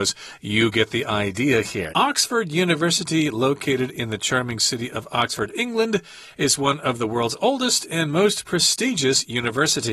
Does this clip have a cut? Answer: yes; 1 cut; at 1.9 s

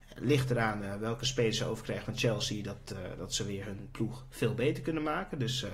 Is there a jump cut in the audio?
no; 0 cuts

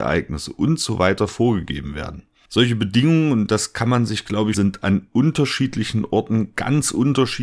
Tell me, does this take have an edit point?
yes; 1 cut; at 4.5 s

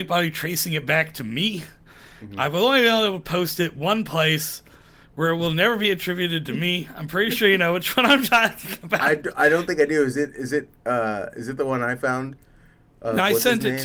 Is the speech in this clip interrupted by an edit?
no; 0 cuts

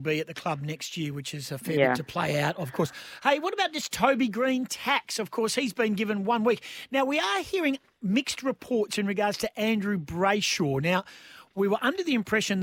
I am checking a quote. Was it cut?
no; 0 cuts

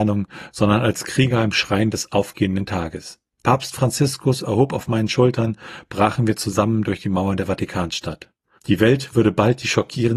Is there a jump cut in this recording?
no; 0 cuts

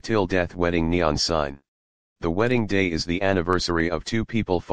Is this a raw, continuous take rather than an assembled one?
no; 1 cut; at 2.1 s

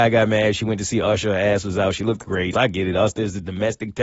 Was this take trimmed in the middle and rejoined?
yes; 1 cut; at 2.5 s

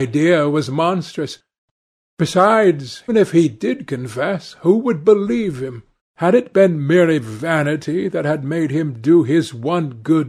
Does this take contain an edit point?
yes; 2 cuts; at 3.1 s, 6.0 s

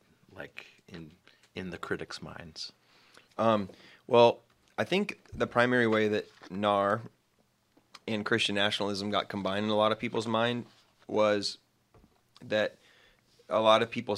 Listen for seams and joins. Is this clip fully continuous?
yes; 0 cuts

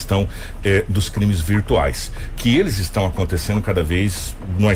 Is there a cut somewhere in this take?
no; 0 cuts

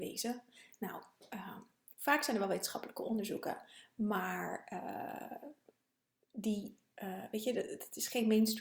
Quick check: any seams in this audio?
no; 0 cuts

